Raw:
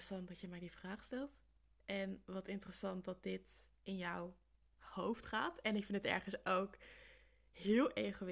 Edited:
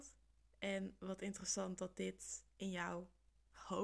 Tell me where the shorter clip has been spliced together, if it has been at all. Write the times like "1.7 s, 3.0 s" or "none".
none